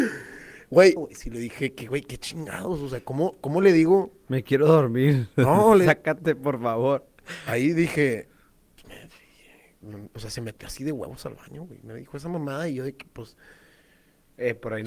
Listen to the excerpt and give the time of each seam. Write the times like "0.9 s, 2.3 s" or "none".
1.0 s